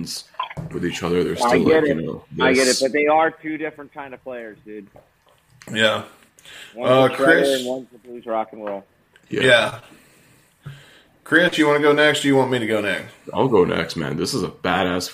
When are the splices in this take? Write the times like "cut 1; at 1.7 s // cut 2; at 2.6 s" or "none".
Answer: none